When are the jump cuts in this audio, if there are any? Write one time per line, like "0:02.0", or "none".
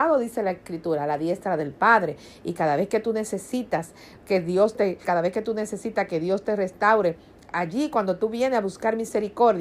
0:05.0